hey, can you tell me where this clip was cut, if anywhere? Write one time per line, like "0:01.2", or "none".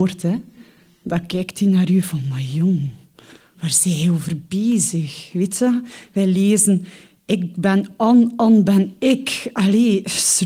none